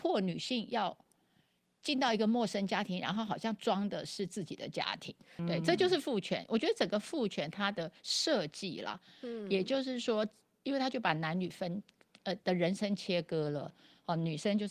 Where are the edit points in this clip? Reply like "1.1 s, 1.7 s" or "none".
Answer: 5.4 s